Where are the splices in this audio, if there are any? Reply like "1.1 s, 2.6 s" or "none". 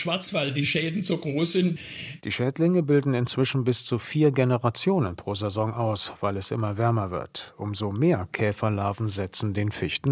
2.2 s